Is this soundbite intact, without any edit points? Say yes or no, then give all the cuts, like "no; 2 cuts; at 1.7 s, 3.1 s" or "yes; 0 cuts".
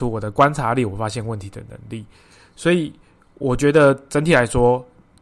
yes; 0 cuts